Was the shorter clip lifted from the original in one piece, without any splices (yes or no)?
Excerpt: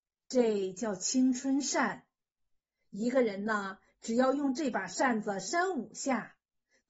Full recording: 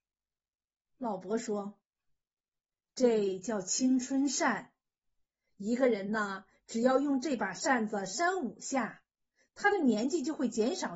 yes